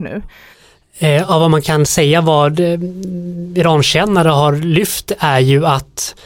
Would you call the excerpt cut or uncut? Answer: uncut